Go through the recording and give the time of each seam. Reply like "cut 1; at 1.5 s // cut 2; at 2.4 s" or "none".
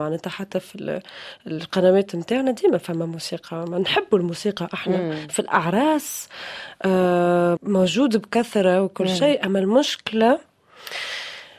cut 1; at 7.6 s